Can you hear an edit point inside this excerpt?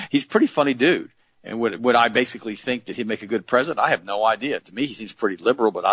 no; 0 cuts

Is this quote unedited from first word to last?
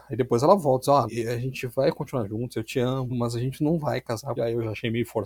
no; 3 cuts; at 1.1 s, 3.1 s, 4.4 s

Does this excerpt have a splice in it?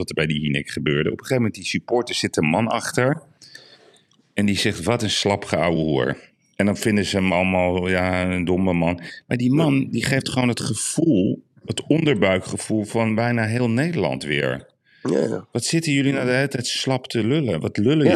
no; 0 cuts

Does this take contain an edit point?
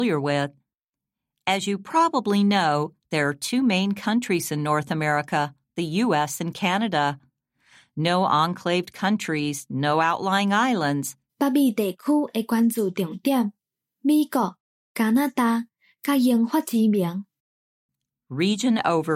yes; 1 cut; at 11.3 s

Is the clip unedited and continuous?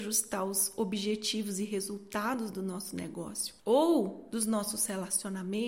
no; 1 cut; at 3.6 s

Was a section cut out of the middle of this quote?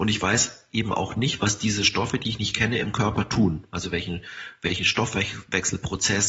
no; 0 cuts

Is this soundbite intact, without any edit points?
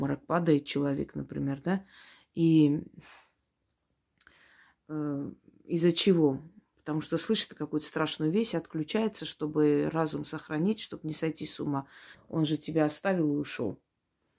no; 1 cut; at 12.1 s

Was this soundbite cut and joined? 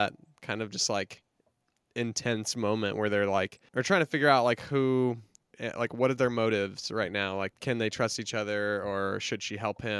no; 0 cuts

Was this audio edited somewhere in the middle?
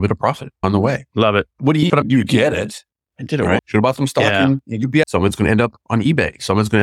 yes; 3 cuts; at 1.9 s, 3.6 s, 5.0 s

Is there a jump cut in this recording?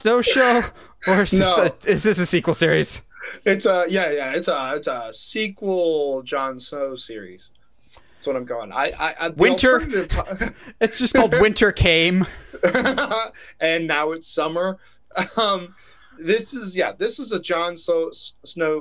no; 0 cuts

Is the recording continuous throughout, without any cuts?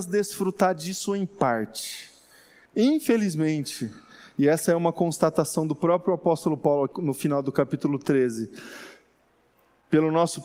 no; 2 cuts; at 2.7 s, 6.9 s

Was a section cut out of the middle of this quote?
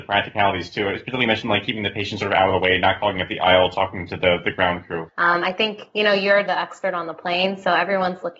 yes; 2 cuts; at 5.1 s, 6.5 s

